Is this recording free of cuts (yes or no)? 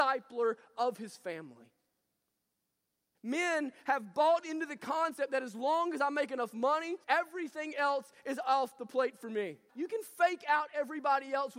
no